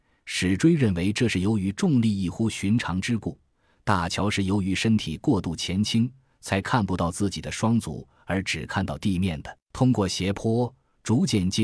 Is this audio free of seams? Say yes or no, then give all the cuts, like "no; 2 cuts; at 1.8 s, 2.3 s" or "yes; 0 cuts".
no; 1 cut; at 9.6 s